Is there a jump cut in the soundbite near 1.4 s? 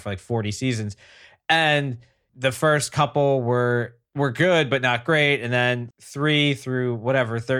no; 1 cut; at 5.9 s

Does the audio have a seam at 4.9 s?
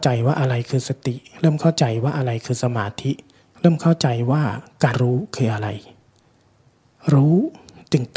yes; 1 cut; at 4.9 s

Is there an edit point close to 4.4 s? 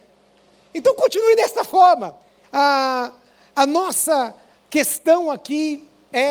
no; 1 cut; at 2.4 s

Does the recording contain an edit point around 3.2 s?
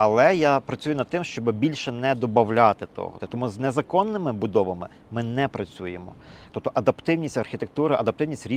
yes; 2 cuts; at 3.2 s, 6.5 s

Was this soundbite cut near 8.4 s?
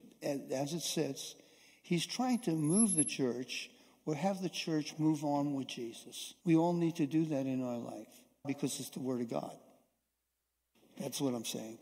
yes; 2 cuts; at 6.4 s, 8.4 s

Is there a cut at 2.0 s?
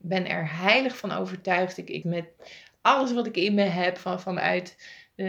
yes; 2 cuts; at 2.0 s, 4.0 s

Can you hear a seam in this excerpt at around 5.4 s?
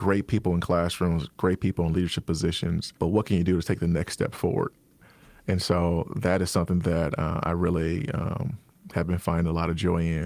no; 1 cut; at 3.0 s

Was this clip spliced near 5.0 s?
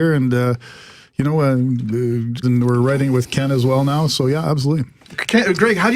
no; 1 cut; at 2.4 s

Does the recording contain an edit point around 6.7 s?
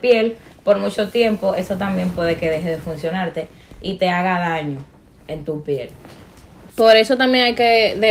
yes; 1 cut; at 6.7 s

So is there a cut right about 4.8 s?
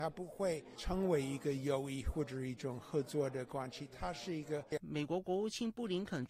yes; 1 cut; at 4.8 s

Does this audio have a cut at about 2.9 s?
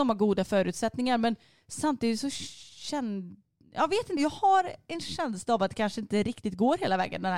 no; 1 cut; at 4.2 s

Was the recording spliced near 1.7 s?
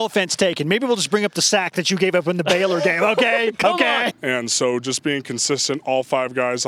no; 1 cut; at 4.1 s

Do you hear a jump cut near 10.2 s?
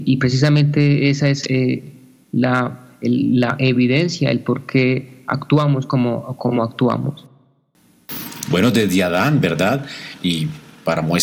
yes; 1 cut; at 10.2 s

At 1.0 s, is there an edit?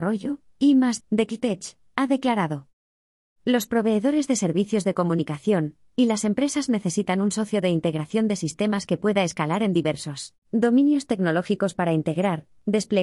yes; 1 cut; at 1.0 s

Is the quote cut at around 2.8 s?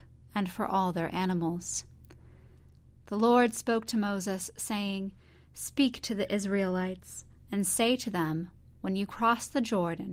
no; 0 cuts

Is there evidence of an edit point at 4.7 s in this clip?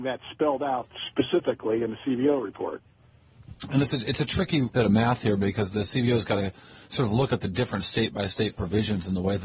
yes; 1 cut; at 4.7 s

